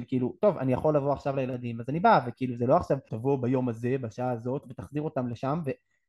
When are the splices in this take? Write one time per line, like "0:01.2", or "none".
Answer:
0:03.1
0:04.6